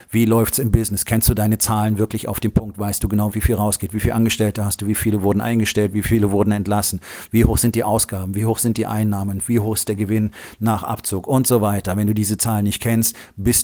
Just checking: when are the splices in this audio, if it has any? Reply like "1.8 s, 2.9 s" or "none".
3.3 s, 7.3 s